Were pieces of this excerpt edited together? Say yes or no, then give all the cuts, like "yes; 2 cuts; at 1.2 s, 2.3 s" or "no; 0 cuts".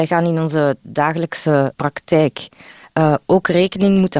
yes; 1 cut; at 1.7 s